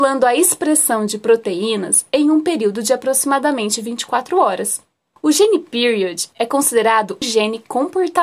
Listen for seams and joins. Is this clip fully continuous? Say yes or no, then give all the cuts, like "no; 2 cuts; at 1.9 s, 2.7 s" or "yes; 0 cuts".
no; 2 cuts; at 5.2 s, 7.2 s